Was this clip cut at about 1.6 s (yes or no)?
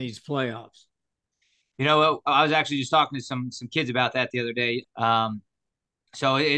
no